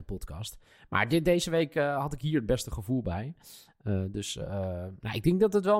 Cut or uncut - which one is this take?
uncut